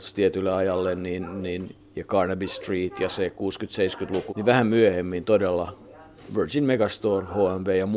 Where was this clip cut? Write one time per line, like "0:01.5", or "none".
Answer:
0:04.3